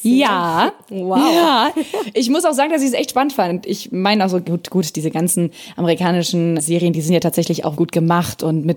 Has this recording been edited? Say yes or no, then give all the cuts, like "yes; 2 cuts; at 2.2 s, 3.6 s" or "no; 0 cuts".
yes; 2 cuts; at 6.6 s, 7.8 s